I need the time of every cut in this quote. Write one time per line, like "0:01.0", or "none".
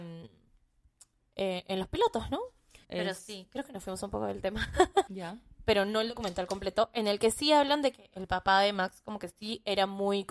0:02.8
0:05.1